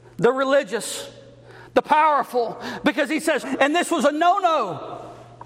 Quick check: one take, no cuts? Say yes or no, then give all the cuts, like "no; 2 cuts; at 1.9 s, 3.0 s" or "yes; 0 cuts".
no; 1 cut; at 3.4 s